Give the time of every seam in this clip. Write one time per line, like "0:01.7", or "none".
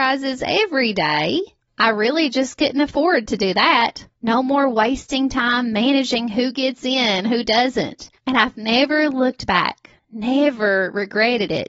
0:04.2
0:08.2